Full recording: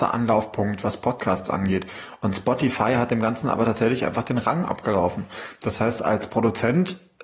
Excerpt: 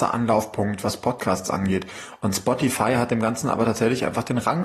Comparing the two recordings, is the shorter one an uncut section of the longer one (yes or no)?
yes